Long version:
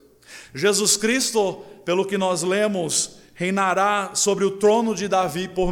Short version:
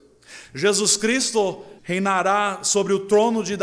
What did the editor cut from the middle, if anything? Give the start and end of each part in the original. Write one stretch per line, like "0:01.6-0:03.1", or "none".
0:01.8-0:03.3